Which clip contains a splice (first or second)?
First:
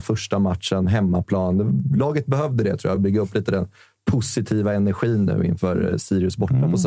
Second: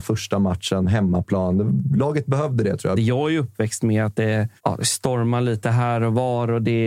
second